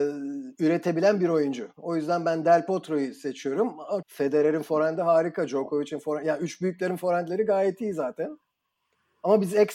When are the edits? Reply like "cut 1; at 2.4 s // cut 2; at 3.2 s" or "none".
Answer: cut 1; at 4.0 s